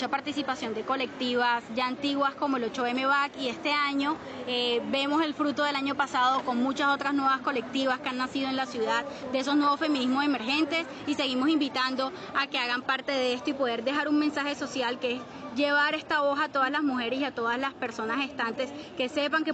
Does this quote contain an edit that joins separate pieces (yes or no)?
no